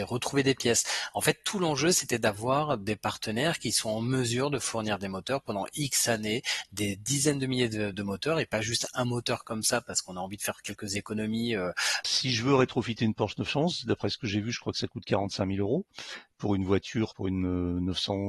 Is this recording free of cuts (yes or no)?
no